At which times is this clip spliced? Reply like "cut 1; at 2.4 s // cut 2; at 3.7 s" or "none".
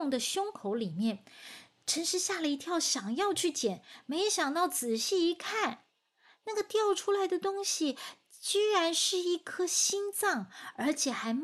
none